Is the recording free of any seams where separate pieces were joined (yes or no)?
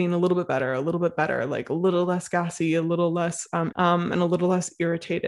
no